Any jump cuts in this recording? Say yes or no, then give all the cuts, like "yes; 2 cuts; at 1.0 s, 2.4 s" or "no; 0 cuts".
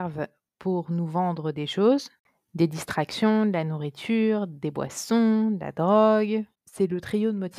yes; 1 cut; at 6.5 s